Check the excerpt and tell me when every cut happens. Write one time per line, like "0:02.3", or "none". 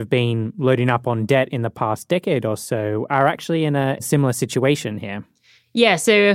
none